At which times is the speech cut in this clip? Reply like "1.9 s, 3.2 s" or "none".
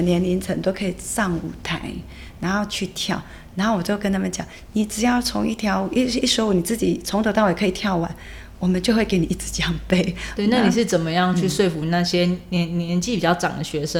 10.4 s

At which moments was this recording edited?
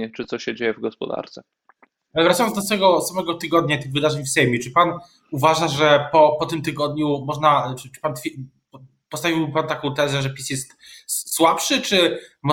none

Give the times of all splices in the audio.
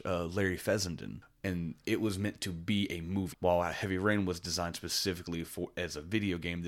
3.3 s

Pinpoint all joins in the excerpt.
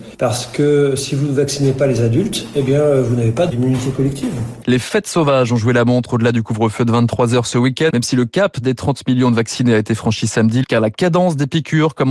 4.6 s, 7.9 s, 10.6 s

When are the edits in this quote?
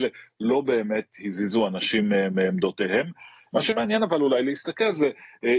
3.5 s

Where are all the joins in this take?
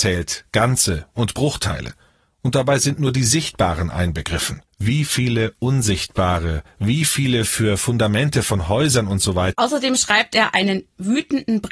4.7 s, 9.5 s

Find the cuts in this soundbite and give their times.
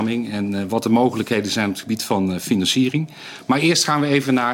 none

